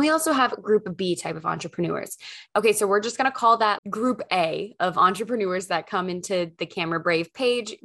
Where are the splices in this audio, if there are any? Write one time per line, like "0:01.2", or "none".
0:02.5
0:03.8